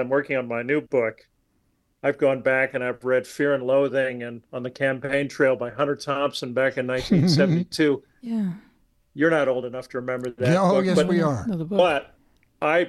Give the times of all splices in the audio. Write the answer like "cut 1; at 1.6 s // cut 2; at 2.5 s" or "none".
none